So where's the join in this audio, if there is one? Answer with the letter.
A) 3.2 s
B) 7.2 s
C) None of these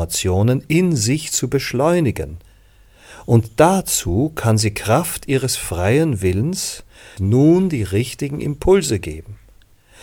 B